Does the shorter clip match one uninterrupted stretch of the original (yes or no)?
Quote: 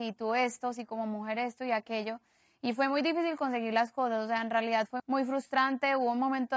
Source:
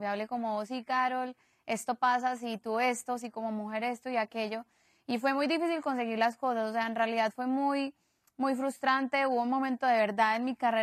no